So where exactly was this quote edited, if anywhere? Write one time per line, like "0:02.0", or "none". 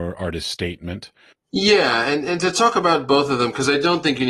0:01.3